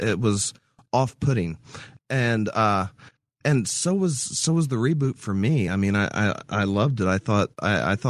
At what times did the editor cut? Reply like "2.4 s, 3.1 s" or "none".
none